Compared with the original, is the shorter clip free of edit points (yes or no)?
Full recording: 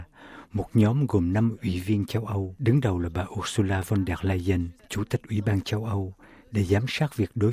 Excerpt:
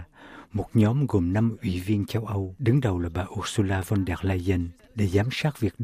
no